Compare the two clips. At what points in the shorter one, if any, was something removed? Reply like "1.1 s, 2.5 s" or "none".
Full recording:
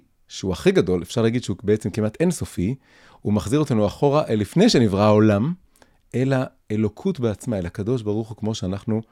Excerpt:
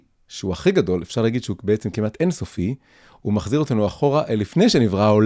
none